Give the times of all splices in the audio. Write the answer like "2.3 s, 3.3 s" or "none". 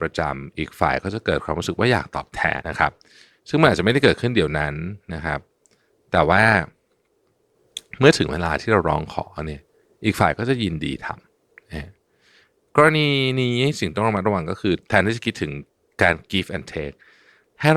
2.6 s